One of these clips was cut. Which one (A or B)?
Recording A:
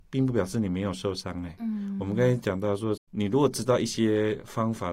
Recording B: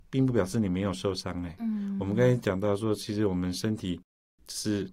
A